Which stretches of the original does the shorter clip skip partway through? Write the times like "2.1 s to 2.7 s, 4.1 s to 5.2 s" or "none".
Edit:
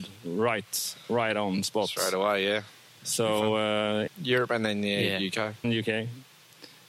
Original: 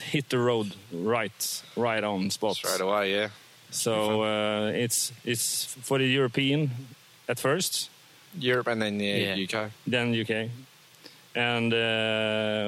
4.7 s to 8.2 s, 9.8 s to 10.1 s